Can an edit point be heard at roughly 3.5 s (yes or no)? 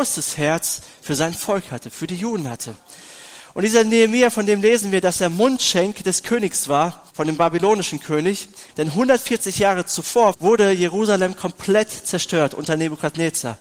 no